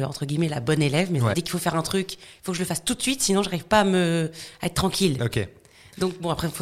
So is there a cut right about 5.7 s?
no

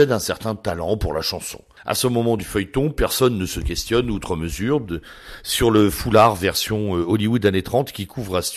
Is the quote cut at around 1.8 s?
yes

